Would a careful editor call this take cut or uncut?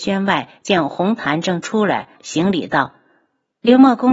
cut